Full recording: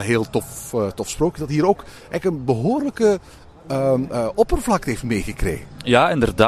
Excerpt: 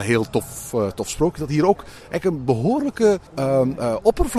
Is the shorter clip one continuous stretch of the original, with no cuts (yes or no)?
no